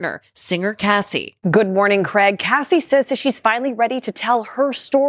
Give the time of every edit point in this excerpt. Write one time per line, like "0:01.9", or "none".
0:01.4